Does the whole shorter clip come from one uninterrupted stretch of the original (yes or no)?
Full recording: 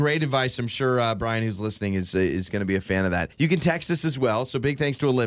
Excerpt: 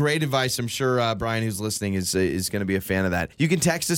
yes